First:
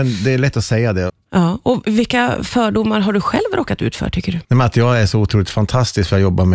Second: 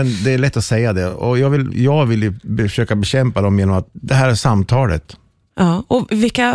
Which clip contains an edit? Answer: first; 2 cuts; at 1.1 s, 4.4 s

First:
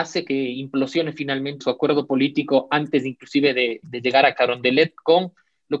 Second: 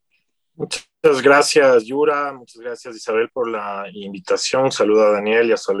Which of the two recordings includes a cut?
first; 2 cuts; at 1.6 s, 3.8 s

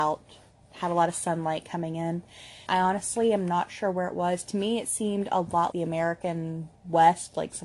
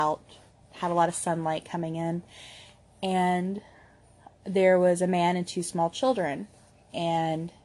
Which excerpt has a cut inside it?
first; 2 cuts; at 2.7 s, 5.7 s

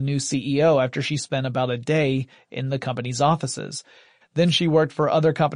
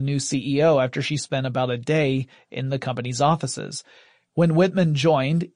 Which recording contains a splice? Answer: first; 1 cut; at 4.2 s

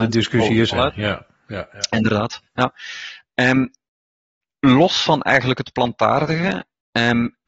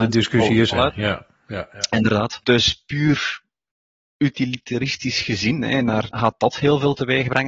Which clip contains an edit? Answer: second; 2 cuts; at 2.4 s, 6.1 s

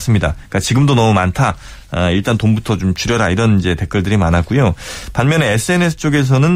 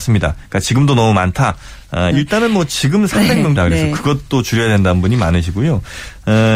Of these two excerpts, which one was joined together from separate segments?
second; 2 cuts; at 2.1 s, 3.6 s

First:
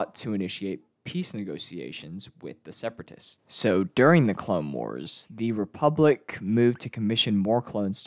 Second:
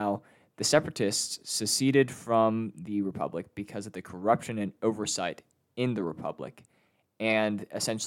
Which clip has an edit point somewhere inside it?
first; 1 cut; at 3.4 s

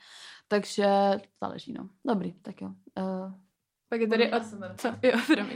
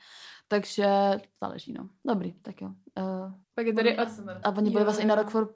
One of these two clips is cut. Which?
second; 2 cuts; at 3.4 s, 4.4 s

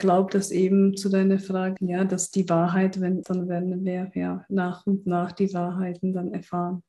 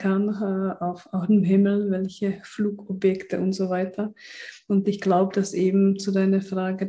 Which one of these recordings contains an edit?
first; 2 cuts; at 1.8 s, 3.2 s

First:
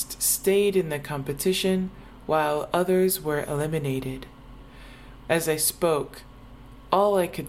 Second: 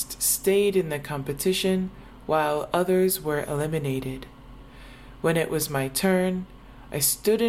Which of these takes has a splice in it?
first; 1 cut; at 5.2 s

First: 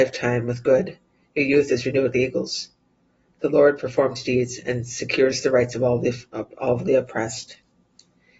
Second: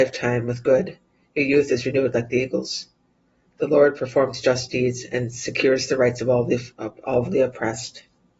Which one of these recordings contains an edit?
first; 2 cuts; at 2.1 s, 4.2 s

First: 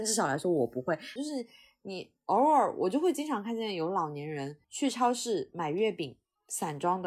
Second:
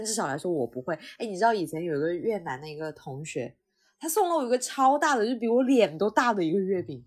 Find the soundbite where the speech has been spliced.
first; 2 cuts; at 1.2 s, 4.6 s

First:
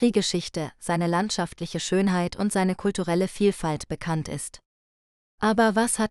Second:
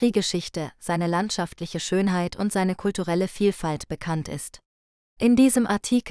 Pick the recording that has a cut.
second; 1 cut; at 5.0 s

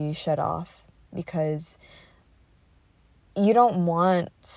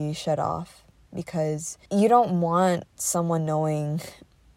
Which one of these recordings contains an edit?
second; 1 cut; at 1.9 s

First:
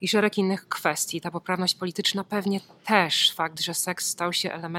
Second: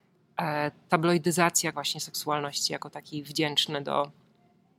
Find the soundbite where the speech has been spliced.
second; 1 cut; at 1.7 s

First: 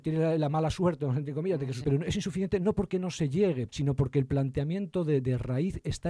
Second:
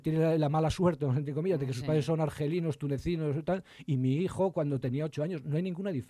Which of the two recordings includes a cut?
first; 2 cuts; at 1.8 s, 3.7 s

